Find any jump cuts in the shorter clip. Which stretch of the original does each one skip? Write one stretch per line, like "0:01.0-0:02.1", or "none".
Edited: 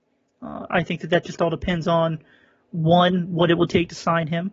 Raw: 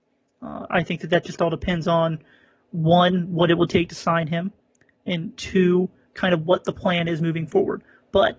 none